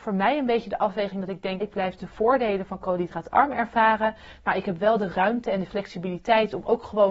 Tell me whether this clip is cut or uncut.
cut